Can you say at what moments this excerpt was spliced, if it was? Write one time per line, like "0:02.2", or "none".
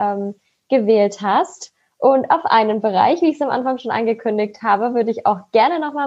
none